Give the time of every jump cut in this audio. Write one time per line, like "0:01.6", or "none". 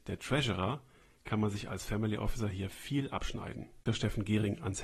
0:03.9